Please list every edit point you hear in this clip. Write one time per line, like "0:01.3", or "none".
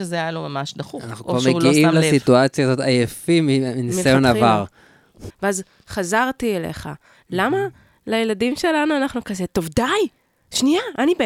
0:05.3

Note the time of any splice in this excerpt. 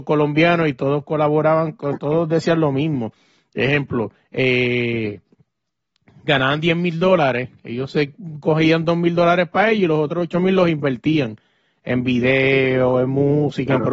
none

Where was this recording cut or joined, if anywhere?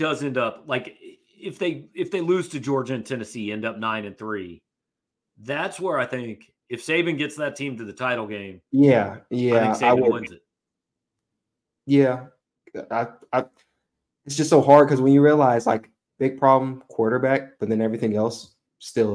none

